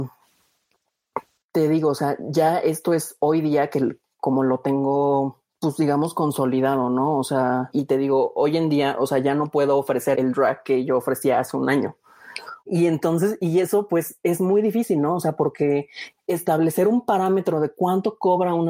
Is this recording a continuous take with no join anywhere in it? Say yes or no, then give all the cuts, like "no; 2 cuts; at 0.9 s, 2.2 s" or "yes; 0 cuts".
no; 3 cuts; at 7.7 s, 10.1 s, 12.6 s